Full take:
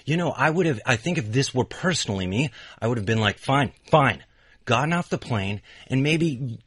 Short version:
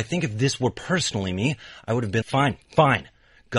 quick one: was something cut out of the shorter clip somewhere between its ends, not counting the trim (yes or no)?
yes